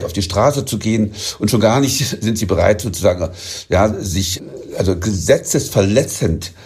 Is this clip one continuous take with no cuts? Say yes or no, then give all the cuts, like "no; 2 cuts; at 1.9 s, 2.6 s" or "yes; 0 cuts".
yes; 0 cuts